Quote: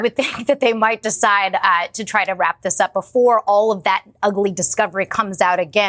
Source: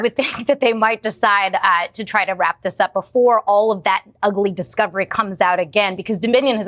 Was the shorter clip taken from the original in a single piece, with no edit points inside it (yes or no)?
yes